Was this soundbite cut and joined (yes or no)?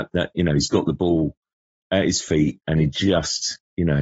no